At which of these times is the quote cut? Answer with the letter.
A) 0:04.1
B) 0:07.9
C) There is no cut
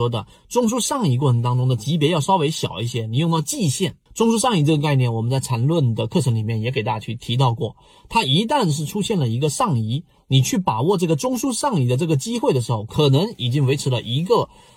A